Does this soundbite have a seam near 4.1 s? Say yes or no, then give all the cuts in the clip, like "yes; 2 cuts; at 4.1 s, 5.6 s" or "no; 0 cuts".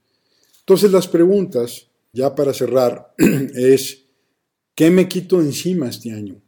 no; 1 cut; at 2.1 s